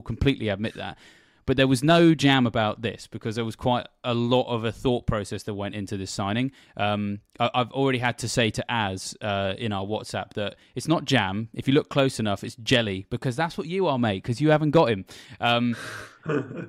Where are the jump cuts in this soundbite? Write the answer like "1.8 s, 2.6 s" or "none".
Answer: none

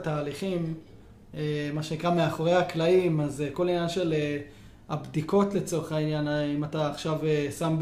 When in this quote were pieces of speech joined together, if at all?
none

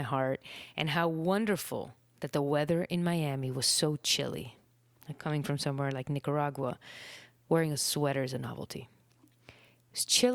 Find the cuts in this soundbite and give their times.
none

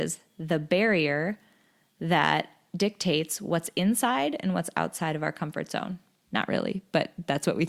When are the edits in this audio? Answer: 6.2 s

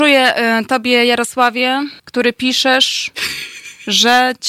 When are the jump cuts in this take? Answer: 2.0 s

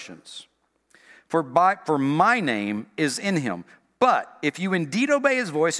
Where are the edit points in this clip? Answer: none

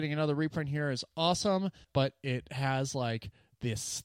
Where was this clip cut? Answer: 1.8 s

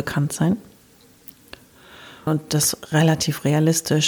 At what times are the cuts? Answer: 2.3 s

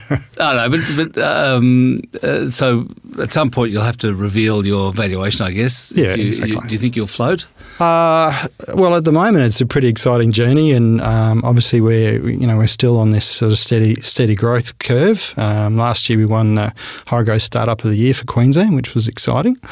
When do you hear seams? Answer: none

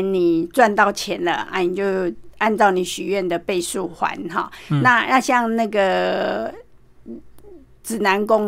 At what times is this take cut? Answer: none

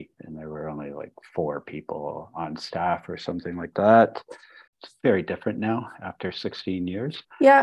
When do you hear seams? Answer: 4.7 s

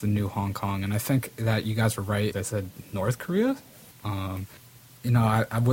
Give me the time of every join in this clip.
2.3 s, 3.9 s

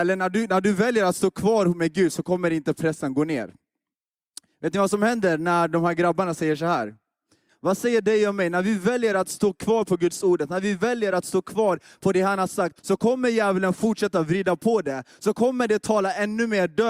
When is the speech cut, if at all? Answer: 7.5 s, 12.8 s

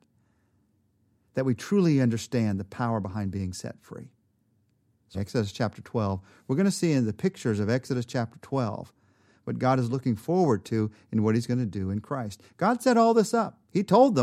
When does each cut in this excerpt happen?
5.1 s

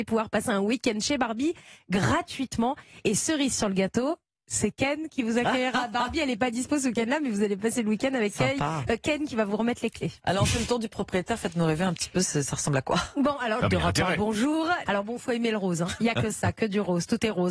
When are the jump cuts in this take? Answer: 13.6 s, 14.9 s, 16.0 s

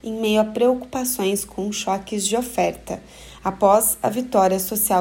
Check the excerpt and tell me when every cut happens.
3.4 s

